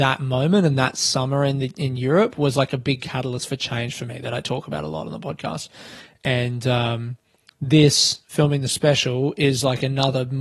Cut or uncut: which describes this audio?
uncut